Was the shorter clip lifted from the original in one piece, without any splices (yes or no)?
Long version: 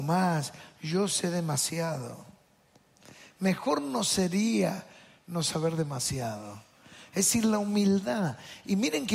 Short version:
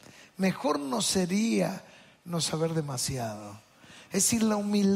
yes